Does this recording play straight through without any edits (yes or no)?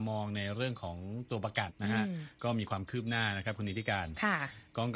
no